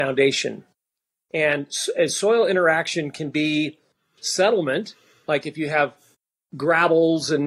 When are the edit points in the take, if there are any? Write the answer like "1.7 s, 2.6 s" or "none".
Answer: none